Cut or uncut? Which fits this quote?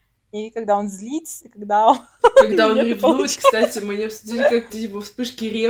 cut